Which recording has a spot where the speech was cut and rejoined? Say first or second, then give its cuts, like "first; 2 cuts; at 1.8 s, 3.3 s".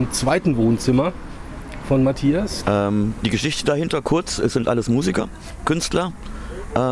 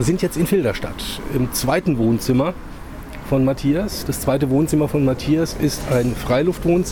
first; 1 cut; at 2.6 s